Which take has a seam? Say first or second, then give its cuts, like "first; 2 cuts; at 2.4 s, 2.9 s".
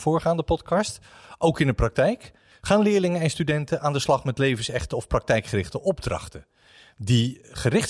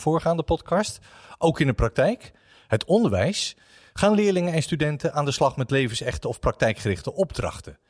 first; 1 cut; at 2.5 s